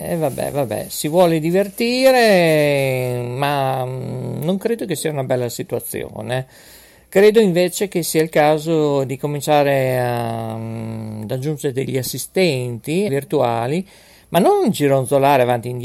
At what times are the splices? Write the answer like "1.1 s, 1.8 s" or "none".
13.1 s